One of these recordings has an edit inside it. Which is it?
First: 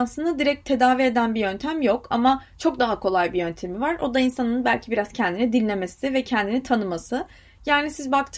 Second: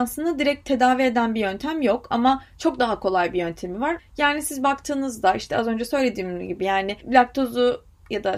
second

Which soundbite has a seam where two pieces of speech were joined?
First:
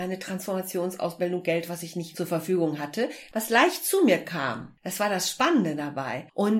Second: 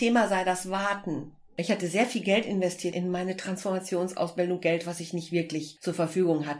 first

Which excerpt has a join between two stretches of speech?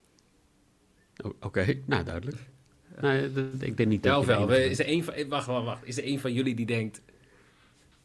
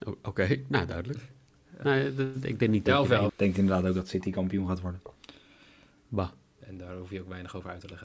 second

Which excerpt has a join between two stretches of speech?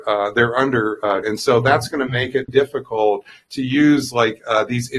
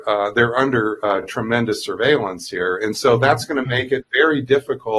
first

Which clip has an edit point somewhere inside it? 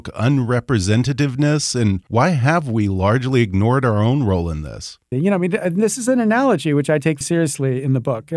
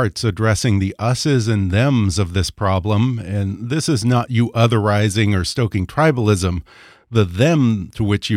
first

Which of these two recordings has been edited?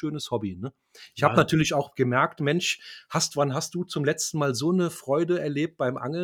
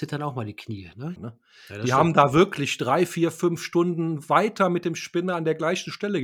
second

